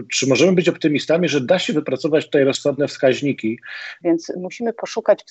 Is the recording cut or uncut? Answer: cut